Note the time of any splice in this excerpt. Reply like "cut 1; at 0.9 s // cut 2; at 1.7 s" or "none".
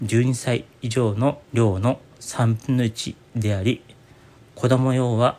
cut 1; at 1.4 s

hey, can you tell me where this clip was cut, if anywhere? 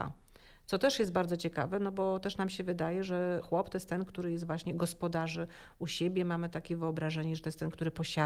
none

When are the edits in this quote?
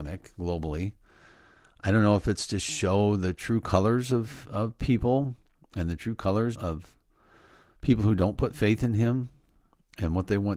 cut 1; at 6.5 s

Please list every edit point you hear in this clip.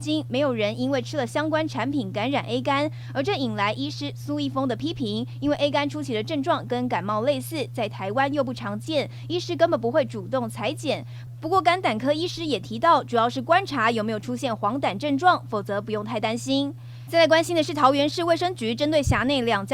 cut 1; at 17.1 s

